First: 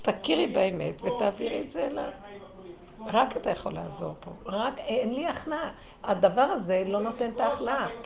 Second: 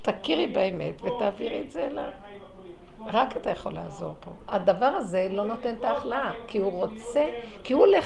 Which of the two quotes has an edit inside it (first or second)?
second